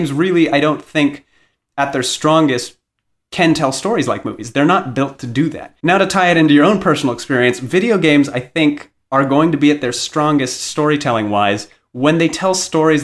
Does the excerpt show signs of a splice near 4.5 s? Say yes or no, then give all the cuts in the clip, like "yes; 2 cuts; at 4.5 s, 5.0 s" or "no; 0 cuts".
no; 1 cut; at 5.8 s